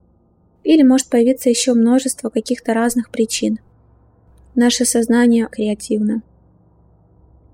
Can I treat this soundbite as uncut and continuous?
no; 1 cut; at 5.5 s

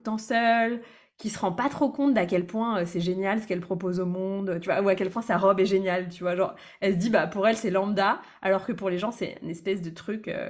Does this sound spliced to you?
no; 0 cuts

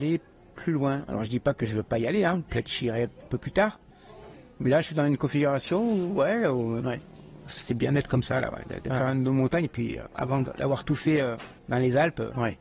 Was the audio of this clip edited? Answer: yes; 1 cut; at 11.6 s

